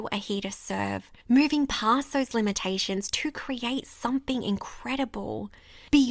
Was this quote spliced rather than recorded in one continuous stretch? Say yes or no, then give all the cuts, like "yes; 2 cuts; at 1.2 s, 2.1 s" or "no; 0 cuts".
yes; 1 cut; at 1.2 s